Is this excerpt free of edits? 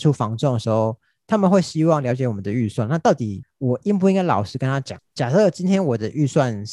yes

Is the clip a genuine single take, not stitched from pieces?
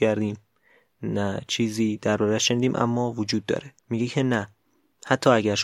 no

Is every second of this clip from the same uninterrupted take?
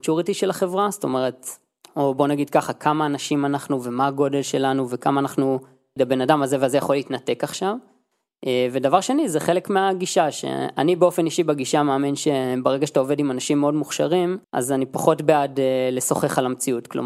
no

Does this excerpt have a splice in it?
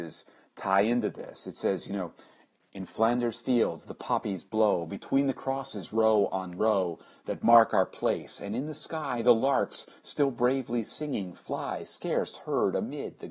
no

